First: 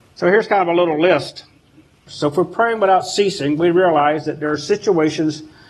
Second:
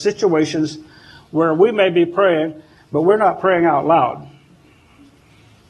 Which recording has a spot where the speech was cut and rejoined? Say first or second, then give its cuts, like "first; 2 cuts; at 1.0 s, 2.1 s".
first; 1 cut; at 2.1 s